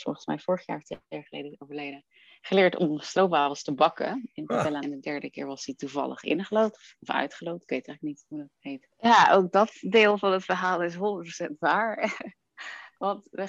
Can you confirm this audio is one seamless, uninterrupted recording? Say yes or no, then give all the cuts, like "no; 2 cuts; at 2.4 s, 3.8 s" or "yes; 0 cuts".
no; 2 cuts; at 4.8 s, 8.9 s